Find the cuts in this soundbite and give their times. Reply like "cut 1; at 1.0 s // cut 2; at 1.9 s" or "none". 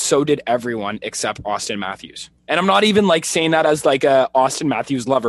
cut 1; at 2.4 s